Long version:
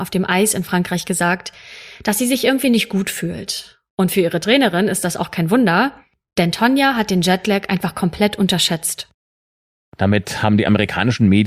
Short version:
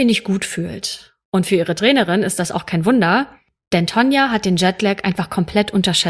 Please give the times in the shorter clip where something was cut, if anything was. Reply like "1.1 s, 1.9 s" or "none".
none